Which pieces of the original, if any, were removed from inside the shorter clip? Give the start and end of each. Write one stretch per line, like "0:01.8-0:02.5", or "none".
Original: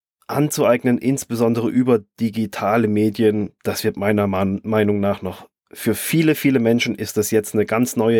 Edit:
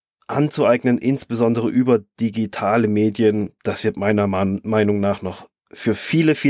none